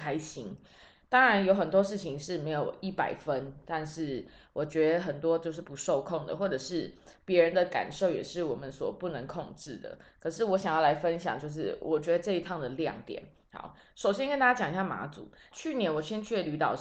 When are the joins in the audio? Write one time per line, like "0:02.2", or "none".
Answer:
0:15.5